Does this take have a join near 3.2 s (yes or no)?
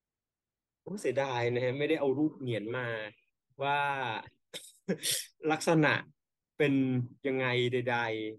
no